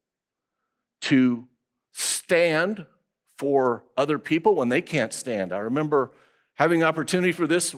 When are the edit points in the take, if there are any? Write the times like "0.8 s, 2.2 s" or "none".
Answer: none